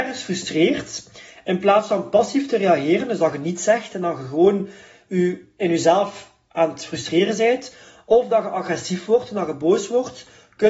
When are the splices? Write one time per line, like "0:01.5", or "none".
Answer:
none